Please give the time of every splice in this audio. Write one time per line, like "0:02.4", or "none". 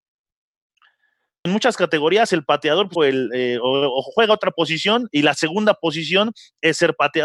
0:01.5
0:03.0